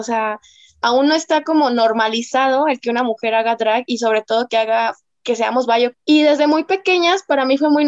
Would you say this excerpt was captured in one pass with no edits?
no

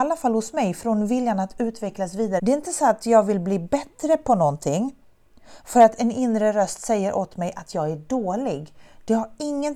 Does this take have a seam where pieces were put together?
yes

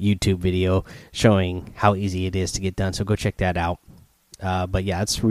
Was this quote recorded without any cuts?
yes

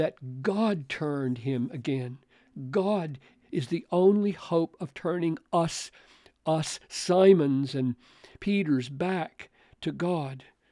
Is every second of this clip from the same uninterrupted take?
yes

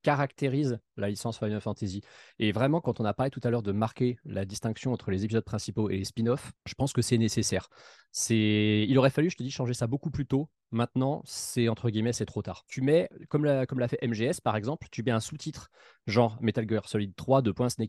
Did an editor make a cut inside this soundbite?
no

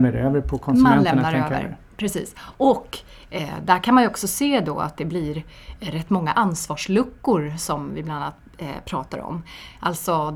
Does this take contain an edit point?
no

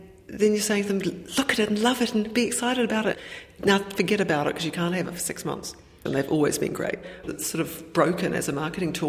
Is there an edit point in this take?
yes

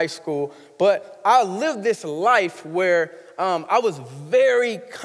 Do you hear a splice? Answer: no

